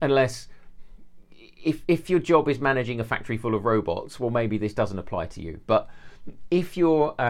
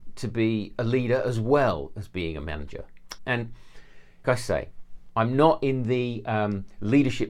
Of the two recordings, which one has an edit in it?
second; 2 cuts; at 3.2 s, 4.2 s

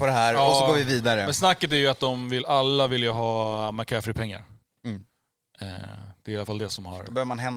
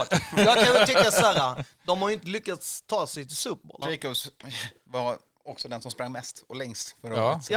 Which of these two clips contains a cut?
second; 1 cut; at 3.8 s

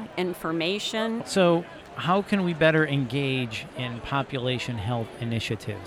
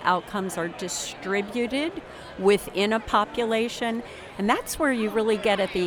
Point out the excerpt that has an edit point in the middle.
first; 1 cut; at 1.2 s

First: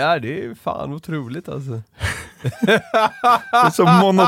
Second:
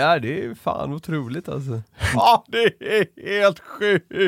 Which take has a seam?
second; 1 cut; at 2.1 s

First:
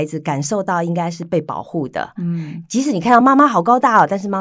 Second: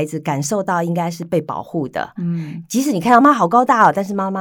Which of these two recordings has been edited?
second; 1 cut; at 3.2 s

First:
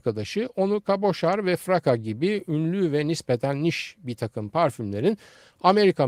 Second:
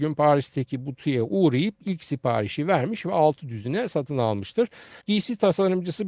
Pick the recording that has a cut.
second; 1 cut; at 5.0 s

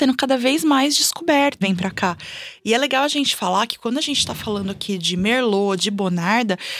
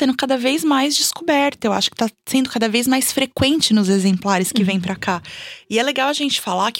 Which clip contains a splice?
first; 2 cuts; at 1.6 s, 5.8 s

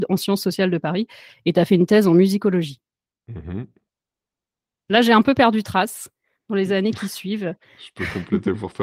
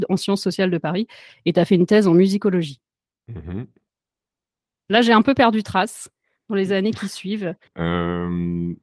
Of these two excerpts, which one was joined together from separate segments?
second; 1 cut; at 7.7 s

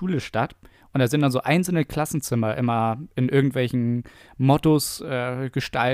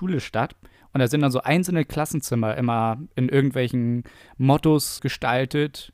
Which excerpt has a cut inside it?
second; 1 cut; at 5.0 s

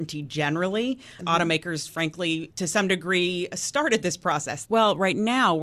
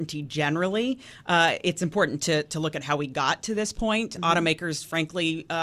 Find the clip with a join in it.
first; 3 cuts; at 1.2 s, 2.5 s, 4.6 s

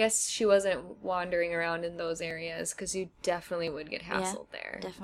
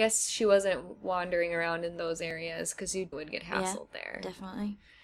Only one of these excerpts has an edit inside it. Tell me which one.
second; 1 cut; at 3.1 s

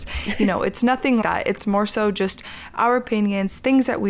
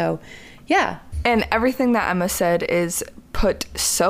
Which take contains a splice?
first; 1 cut; at 1.2 s

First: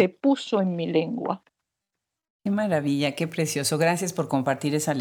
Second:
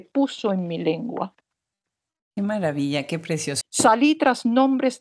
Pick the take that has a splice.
second; 1 cut; at 3.6 s

